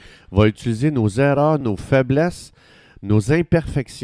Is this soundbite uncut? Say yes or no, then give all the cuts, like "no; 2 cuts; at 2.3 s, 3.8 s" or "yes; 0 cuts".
no; 1 cut; at 1.6 s